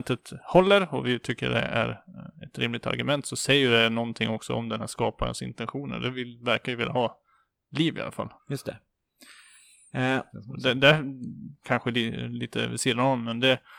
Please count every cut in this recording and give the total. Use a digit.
2